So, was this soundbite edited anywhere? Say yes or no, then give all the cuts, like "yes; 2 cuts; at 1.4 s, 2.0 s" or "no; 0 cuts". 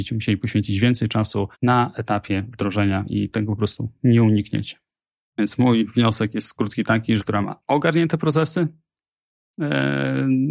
yes; 2 cuts; at 1.5 s, 7.2 s